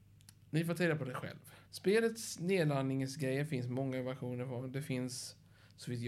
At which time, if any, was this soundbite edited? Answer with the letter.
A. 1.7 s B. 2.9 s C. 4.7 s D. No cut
A